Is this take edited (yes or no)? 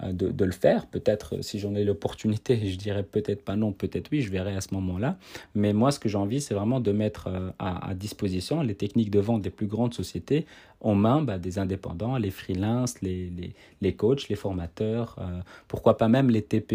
no